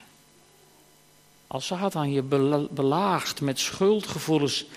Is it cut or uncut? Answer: cut